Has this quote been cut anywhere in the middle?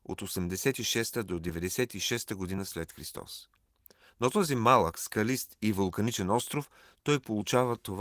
no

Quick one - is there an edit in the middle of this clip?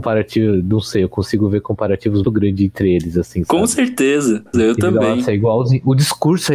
yes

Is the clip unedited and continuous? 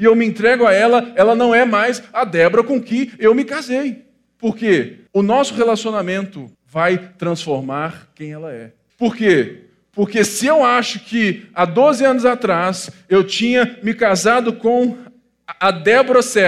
no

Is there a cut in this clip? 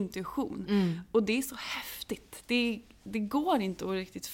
no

